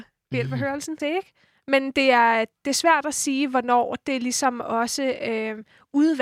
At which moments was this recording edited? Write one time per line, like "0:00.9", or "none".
0:01.0